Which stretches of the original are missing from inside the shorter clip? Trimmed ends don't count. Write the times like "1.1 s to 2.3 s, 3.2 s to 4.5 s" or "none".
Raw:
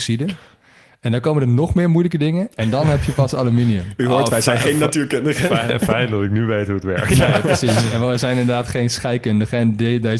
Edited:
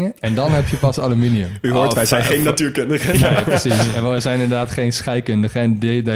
5.5 s to 7.1 s